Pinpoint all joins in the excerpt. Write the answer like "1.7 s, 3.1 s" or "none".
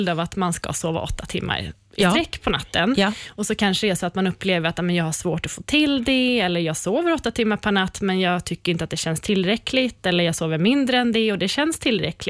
none